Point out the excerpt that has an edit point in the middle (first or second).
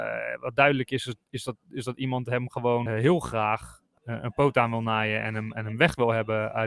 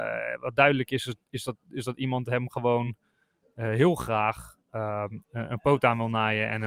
first